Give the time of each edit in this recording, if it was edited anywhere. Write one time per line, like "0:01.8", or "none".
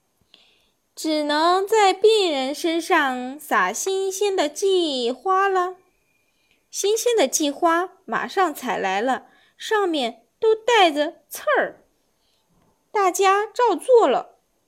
0:12.1